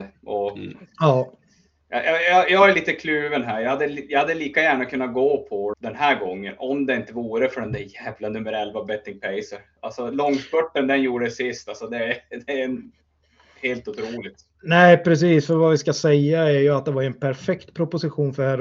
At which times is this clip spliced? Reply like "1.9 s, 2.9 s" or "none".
5.7 s